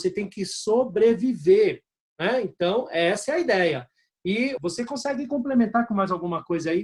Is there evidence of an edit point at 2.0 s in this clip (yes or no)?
yes